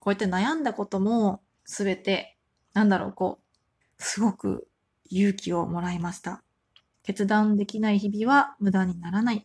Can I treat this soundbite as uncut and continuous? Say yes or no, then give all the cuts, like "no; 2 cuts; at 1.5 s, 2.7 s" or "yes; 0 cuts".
no; 3 cuts; at 1.6 s, 3.8 s, 6.9 s